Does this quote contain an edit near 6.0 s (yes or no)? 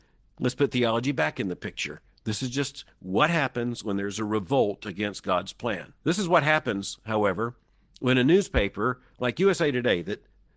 yes